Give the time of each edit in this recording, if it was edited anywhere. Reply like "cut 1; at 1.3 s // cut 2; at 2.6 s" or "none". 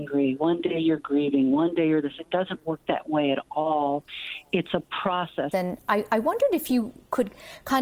cut 1; at 5.5 s